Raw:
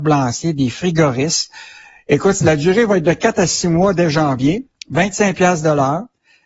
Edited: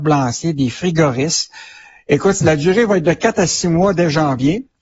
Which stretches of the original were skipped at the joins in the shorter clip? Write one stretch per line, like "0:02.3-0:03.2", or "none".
none